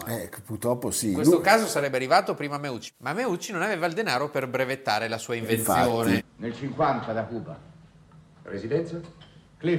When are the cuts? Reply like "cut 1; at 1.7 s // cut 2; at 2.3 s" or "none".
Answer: cut 1; at 6.2 s